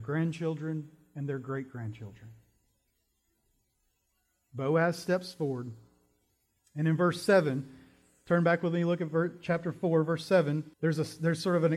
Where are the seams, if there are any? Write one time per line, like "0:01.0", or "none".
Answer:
0:10.7